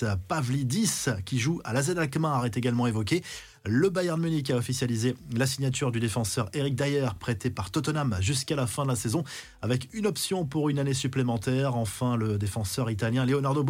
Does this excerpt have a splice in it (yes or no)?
no